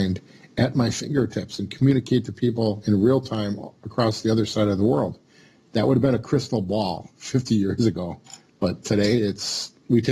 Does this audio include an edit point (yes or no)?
no